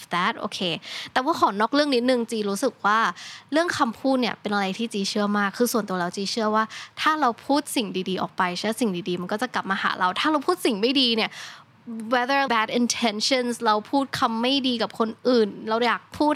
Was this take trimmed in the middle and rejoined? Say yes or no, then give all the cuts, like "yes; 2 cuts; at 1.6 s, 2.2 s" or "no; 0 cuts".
yes; 1 cut; at 12.5 s